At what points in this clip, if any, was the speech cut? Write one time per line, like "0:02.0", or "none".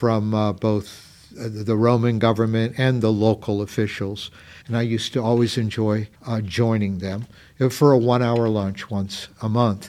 0:04.6
0:06.1